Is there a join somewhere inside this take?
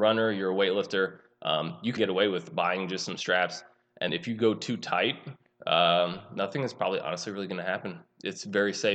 yes; 2 cuts; at 2.0 s, 4.1 s

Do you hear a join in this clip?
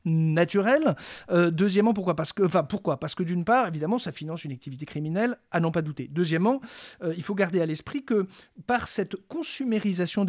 no; 0 cuts

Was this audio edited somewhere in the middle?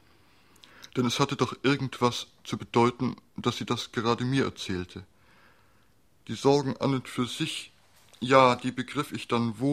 no; 0 cuts

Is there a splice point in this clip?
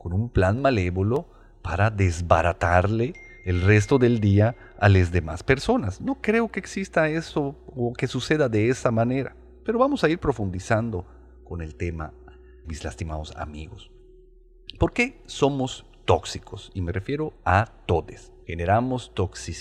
yes; 2 cuts; at 12.6 s, 18.4 s

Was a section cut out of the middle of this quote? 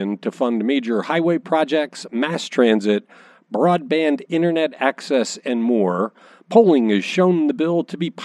no; 0 cuts

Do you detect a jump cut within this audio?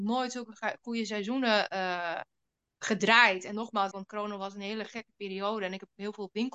yes; 1 cut; at 3.9 s

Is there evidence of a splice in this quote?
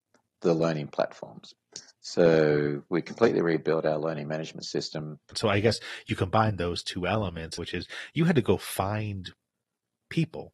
yes; 2 cuts; at 5.3 s, 7.6 s

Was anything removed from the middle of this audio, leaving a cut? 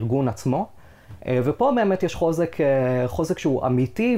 yes; 1 cut; at 1.2 s

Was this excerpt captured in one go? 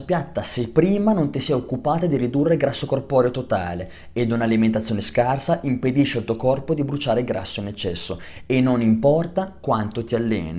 yes; 0 cuts

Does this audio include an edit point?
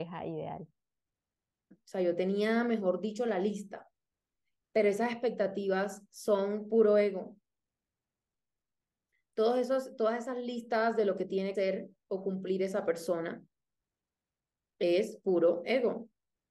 yes; 2 cuts; at 1.7 s, 11.5 s

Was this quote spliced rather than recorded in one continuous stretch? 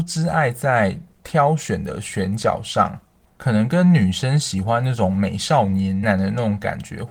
yes; 1 cut; at 6.0 s

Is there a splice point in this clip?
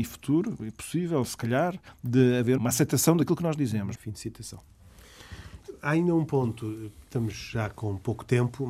yes; 2 cuts; at 2.6 s, 4.0 s

